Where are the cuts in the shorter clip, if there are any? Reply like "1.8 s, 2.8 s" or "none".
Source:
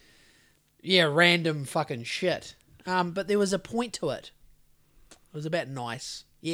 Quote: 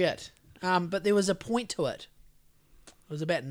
none